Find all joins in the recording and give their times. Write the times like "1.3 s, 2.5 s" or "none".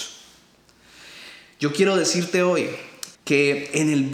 3.2 s